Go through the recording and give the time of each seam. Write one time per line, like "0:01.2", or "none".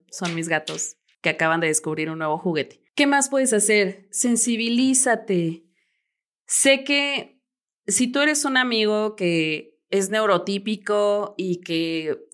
none